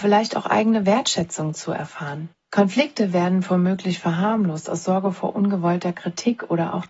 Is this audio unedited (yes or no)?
no